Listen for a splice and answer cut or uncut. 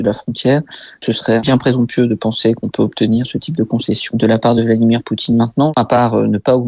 cut